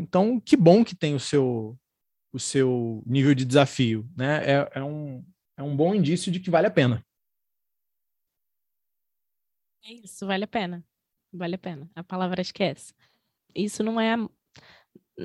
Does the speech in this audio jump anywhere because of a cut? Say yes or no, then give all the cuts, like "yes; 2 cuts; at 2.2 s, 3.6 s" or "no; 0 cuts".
yes; 1 cut; at 13.4 s